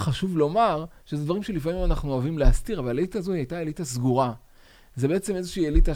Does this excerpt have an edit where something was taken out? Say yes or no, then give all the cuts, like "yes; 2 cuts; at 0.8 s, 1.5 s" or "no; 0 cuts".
no; 0 cuts